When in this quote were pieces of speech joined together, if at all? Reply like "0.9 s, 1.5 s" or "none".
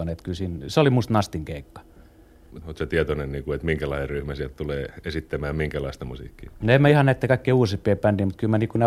2.6 s

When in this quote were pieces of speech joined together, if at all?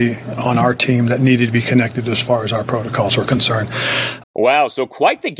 4.2 s

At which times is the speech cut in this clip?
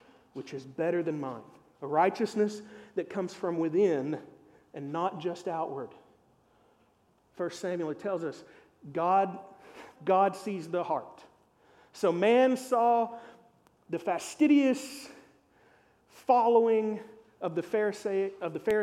10.0 s

